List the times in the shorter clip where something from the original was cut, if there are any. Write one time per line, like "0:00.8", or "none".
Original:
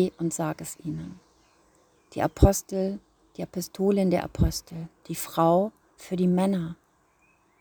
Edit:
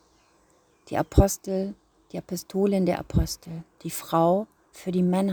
none